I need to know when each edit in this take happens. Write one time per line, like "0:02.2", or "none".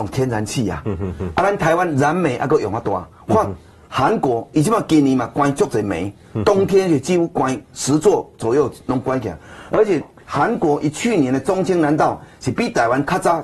none